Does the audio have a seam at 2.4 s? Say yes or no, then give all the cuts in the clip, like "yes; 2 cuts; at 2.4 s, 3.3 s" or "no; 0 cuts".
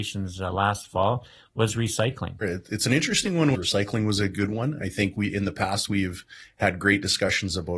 yes; 2 cuts; at 2.4 s, 3.5 s